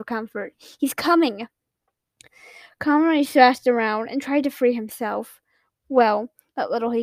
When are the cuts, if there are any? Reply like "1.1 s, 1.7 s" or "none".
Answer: 2.3 s